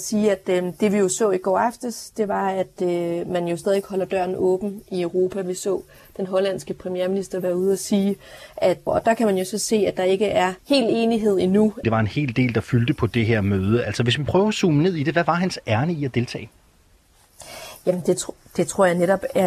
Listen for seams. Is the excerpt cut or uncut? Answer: cut